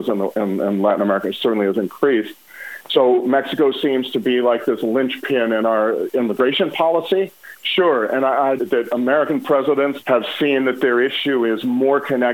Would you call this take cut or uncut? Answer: cut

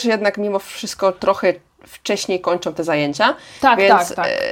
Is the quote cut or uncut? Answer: uncut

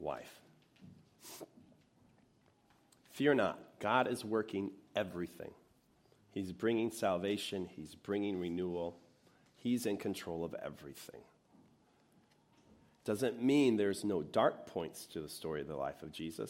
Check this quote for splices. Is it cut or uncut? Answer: uncut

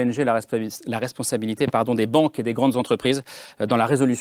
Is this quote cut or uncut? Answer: uncut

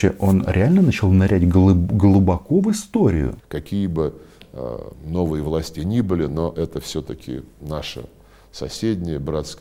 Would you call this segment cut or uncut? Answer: cut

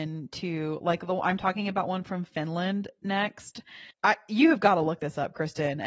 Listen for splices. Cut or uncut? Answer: cut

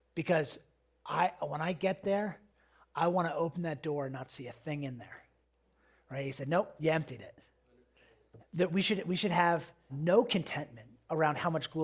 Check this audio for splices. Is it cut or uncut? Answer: cut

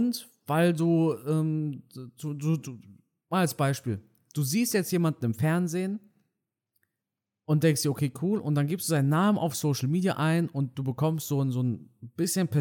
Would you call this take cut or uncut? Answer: uncut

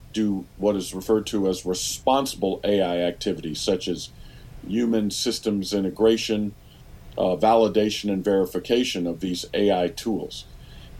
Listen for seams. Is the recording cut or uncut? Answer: uncut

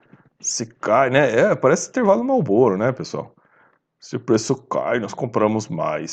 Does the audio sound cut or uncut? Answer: uncut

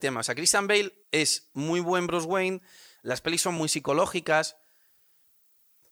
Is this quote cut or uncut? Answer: cut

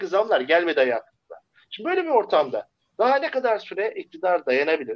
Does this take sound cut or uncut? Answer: uncut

